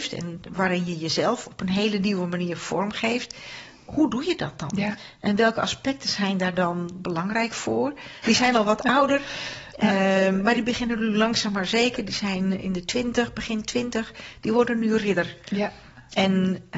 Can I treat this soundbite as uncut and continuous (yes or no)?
no